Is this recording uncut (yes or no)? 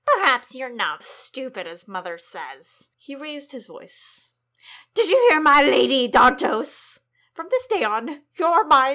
no